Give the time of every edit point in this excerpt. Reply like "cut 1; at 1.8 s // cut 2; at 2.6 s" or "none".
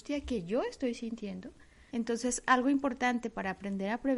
cut 1; at 1.9 s